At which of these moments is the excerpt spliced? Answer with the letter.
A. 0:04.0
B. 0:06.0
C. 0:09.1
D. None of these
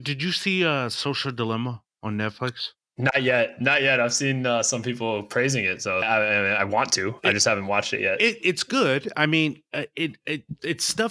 B